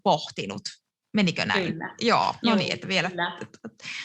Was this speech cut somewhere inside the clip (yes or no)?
yes